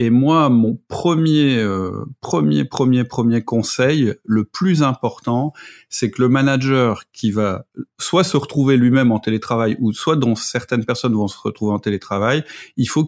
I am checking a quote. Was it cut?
no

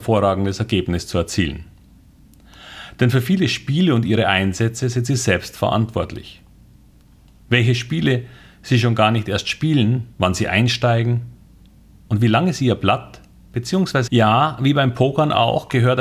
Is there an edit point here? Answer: yes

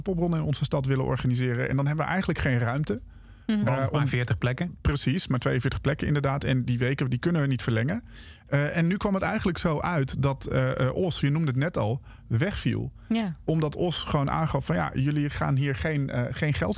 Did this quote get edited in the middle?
no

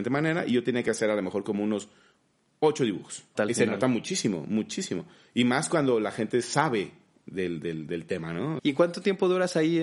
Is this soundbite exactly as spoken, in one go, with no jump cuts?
no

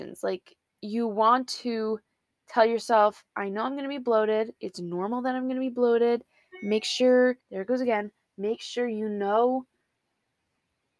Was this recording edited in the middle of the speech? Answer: yes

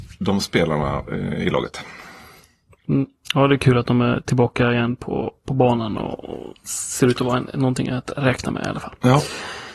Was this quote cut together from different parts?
no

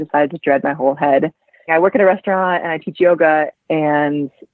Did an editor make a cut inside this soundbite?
yes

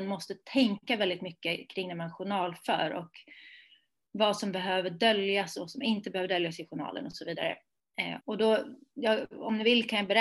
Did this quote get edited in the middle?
yes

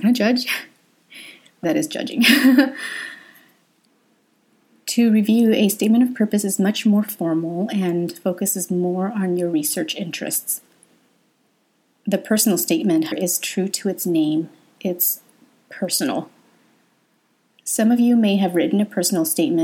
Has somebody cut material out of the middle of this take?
yes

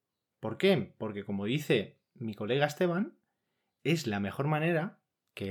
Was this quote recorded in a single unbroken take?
yes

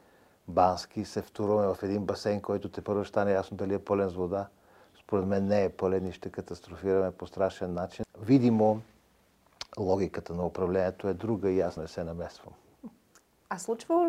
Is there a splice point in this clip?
yes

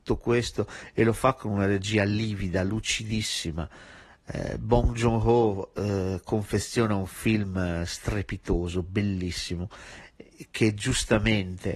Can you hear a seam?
no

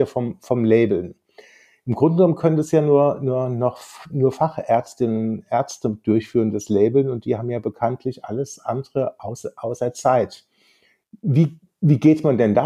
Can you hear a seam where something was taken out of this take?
no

